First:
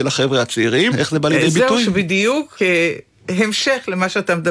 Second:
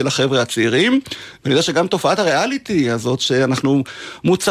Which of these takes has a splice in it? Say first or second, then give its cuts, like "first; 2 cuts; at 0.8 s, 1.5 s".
first; 1 cut; at 0.9 s